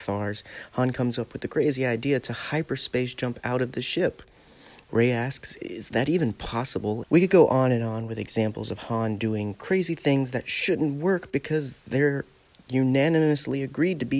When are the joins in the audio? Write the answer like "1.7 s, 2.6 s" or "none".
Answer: 7.0 s